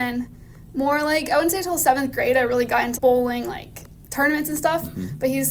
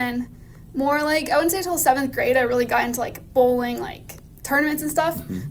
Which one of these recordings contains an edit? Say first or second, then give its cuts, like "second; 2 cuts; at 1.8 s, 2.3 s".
first; 1 cut; at 3.0 s